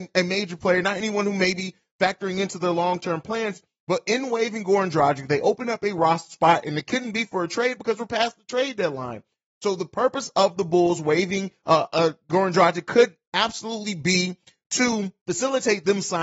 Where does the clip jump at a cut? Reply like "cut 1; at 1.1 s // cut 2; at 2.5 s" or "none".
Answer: none